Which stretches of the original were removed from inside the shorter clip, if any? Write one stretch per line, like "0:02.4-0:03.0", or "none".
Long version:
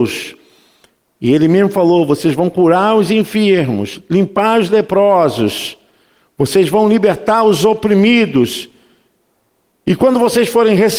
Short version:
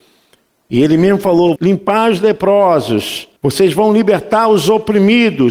0:02.1-0:04.0
0:05.9-0:06.3